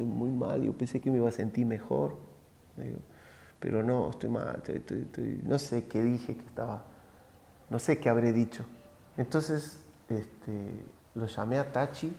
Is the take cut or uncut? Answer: cut